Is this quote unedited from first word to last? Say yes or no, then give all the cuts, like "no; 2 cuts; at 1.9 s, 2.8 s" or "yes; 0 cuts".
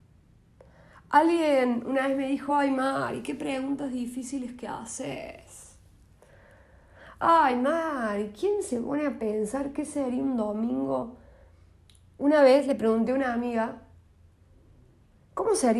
yes; 0 cuts